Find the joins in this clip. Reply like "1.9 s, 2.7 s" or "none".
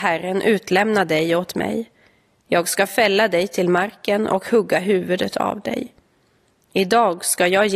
none